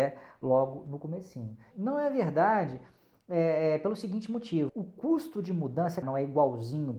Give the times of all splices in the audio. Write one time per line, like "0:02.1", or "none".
0:01.7
0:04.7
0:06.0